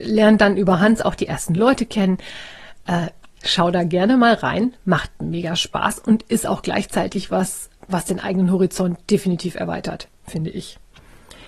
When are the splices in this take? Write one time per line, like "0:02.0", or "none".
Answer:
0:03.3
0:07.8